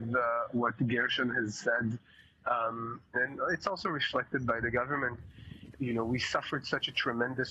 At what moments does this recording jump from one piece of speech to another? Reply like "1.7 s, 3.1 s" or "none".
3.1 s, 5.7 s